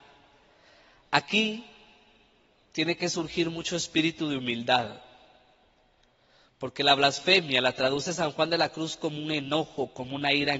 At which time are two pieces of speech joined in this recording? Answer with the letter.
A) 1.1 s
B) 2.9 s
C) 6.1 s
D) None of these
D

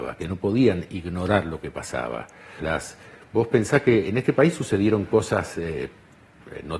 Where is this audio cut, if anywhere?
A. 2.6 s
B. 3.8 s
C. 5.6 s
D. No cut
A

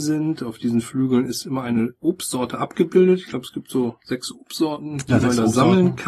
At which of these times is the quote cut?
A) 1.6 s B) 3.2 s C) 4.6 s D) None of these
D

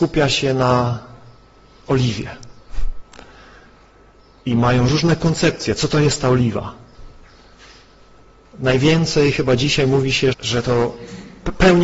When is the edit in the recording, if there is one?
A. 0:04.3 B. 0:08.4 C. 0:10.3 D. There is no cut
C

